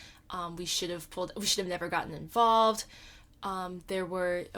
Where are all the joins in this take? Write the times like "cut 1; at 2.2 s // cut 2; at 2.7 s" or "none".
none